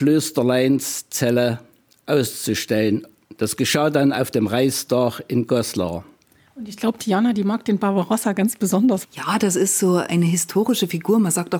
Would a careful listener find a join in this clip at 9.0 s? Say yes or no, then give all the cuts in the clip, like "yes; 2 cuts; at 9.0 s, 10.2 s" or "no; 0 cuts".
yes; 2 cuts; at 9.0 s, 10.1 s